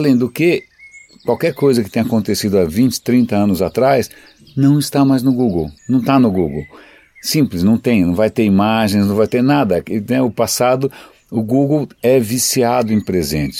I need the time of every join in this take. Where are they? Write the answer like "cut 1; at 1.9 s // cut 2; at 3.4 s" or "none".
cut 1; at 5.8 s